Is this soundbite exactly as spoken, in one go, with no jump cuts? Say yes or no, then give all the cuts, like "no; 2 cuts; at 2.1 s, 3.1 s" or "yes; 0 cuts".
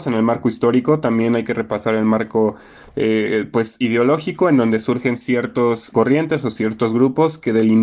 no; 1 cut; at 5.9 s